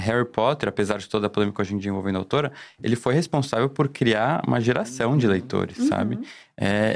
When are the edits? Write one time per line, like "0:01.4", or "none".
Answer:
none

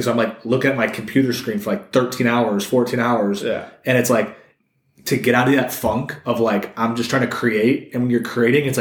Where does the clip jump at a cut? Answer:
none

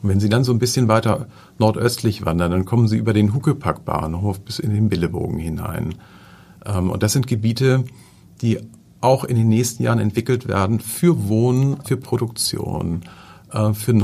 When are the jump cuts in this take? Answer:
0:11.8

